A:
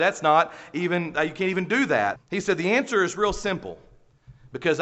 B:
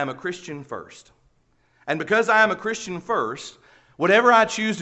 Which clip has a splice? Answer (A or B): A